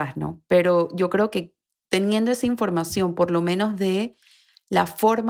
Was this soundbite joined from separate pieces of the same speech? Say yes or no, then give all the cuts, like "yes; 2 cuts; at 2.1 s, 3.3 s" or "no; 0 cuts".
no; 0 cuts